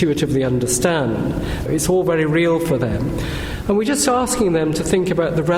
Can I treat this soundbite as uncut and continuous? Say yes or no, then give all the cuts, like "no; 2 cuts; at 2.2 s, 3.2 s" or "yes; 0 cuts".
no; 1 cut; at 1.7 s